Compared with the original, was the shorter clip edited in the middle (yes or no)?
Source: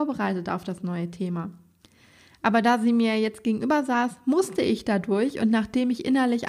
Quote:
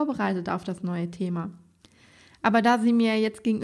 no